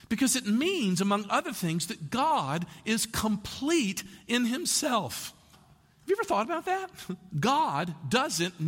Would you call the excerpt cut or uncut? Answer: cut